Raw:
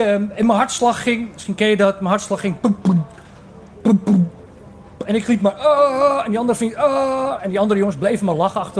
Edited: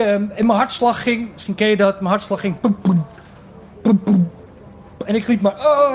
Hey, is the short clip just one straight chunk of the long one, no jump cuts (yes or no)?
yes